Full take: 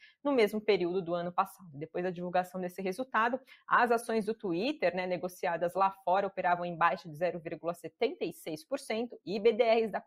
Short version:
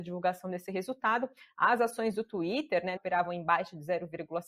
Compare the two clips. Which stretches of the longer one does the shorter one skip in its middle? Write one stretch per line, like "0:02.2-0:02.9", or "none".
0:05.1-0:06.3